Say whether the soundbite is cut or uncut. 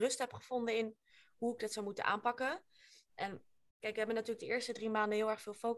uncut